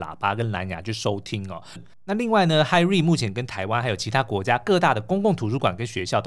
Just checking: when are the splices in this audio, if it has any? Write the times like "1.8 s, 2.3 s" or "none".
1.8 s